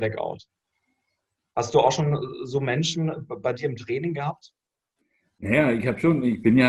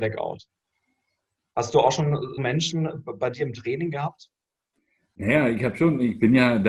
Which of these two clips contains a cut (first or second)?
second